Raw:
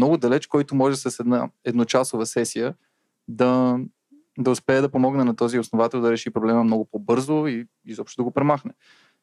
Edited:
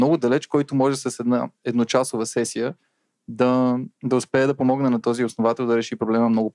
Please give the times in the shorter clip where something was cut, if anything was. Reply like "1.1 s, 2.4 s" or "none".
3.9 s